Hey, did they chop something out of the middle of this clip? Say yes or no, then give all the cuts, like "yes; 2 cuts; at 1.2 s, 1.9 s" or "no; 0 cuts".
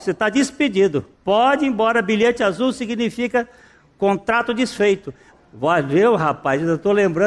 yes; 2 cuts; at 1.1 s, 5.3 s